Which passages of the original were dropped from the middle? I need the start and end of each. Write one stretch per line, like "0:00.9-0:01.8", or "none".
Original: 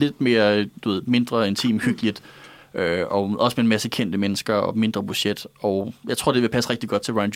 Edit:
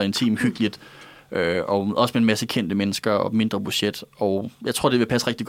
none